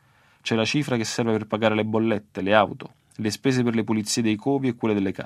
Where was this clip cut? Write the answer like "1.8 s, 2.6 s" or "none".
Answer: none